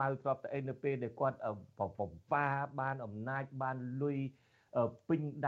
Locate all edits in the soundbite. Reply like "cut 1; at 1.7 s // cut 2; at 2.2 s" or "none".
none